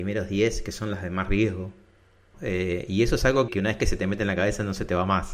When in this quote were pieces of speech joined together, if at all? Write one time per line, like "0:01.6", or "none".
0:02.3
0:03.5